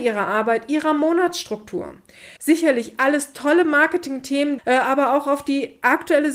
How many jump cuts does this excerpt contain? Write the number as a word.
two